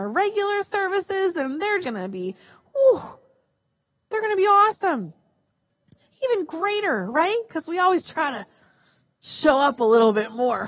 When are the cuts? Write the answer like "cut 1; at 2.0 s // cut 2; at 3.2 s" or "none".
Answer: cut 1; at 1.8 s